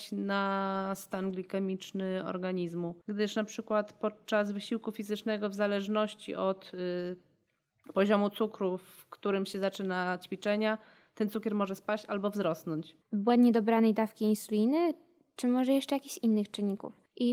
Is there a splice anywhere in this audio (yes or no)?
yes